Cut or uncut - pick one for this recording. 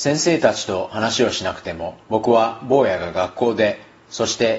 cut